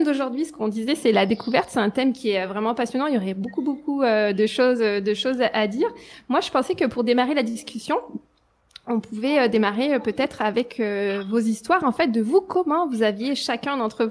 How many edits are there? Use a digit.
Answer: 0